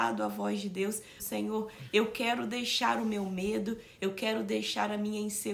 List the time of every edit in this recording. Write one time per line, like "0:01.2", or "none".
0:01.2